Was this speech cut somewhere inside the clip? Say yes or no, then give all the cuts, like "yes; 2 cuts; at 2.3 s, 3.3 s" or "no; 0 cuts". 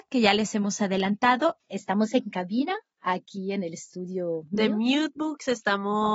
yes; 1 cut; at 1.6 s